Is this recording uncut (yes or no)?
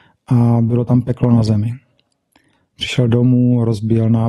no